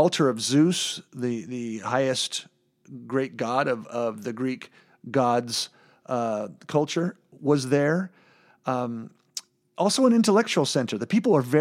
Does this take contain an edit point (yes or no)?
no